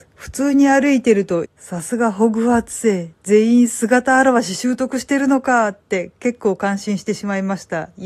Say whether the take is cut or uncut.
cut